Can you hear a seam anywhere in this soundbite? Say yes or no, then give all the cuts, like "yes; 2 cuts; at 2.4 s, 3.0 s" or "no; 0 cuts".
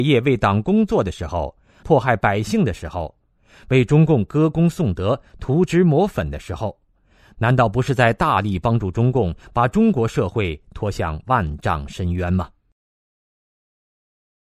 yes; 1 cut; at 1.8 s